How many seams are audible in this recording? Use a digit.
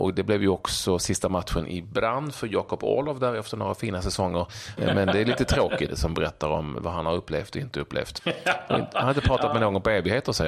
3